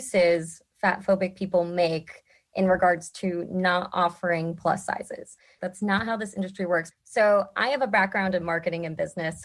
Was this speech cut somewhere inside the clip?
yes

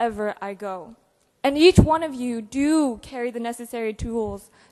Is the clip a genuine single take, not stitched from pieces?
no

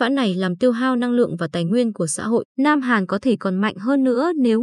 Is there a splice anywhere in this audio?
yes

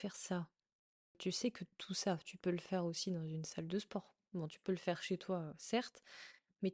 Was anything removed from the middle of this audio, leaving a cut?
no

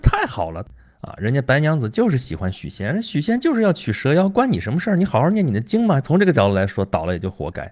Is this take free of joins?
no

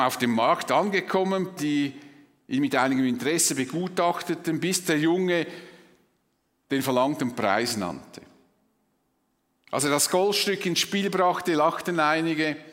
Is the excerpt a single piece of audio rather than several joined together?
no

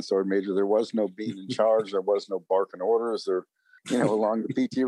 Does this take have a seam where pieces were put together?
yes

